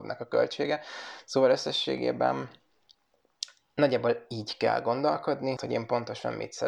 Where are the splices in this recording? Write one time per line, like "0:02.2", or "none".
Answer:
0:05.6